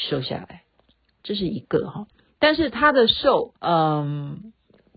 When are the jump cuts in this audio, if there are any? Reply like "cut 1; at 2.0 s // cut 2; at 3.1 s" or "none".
cut 1; at 3.6 s